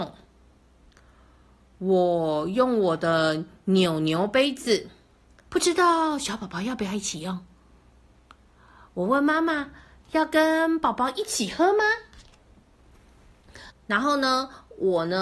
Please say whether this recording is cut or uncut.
cut